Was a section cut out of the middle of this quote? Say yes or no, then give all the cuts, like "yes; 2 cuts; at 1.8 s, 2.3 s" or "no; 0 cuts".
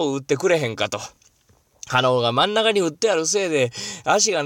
no; 0 cuts